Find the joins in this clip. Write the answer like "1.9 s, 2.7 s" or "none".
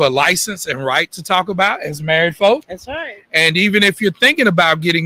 none